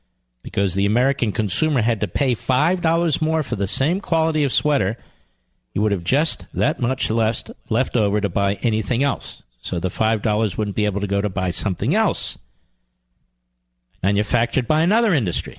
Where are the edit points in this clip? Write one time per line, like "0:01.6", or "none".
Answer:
none